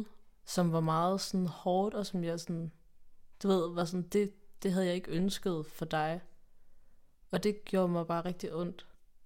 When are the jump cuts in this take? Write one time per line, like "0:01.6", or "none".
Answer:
none